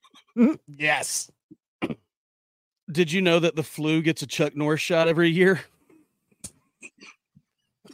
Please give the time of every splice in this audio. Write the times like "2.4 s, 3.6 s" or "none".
2.8 s